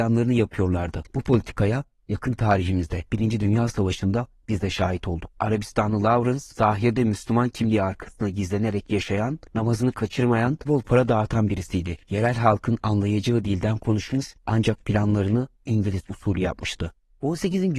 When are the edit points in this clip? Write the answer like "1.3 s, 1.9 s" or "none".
6.5 s, 10.6 s